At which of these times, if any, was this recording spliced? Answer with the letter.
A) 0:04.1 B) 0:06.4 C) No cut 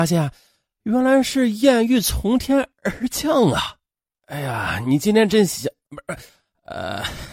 A